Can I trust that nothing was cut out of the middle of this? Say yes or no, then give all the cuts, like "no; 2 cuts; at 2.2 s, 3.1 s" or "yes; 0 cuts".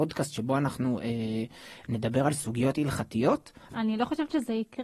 no; 1 cut; at 3.7 s